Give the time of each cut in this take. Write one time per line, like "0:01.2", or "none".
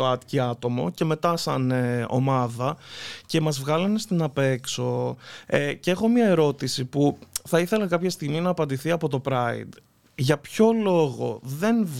none